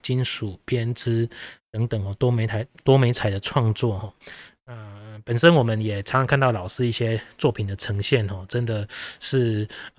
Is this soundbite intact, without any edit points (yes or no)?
yes